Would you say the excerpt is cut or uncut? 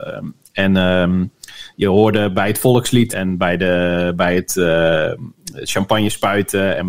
cut